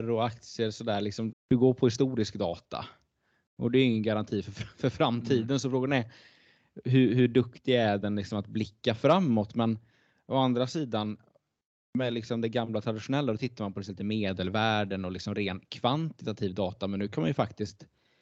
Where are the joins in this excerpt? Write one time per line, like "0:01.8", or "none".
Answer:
0:01.3